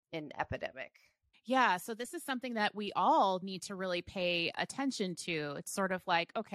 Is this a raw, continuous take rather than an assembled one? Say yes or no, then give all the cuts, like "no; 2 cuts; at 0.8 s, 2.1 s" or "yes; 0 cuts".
no; 1 cut; at 1.3 s